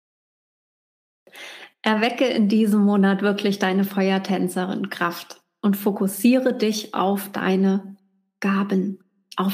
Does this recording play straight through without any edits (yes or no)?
yes